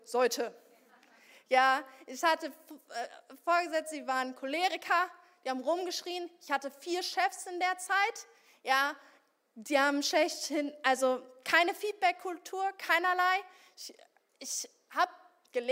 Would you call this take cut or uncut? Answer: uncut